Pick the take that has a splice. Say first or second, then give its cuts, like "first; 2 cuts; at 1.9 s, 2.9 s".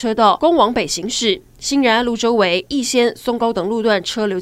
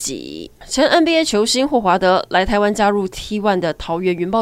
first; 1 cut; at 2.7 s